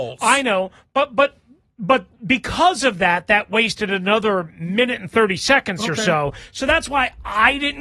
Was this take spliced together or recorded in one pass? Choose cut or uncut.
uncut